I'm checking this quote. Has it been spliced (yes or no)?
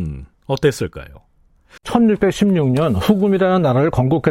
yes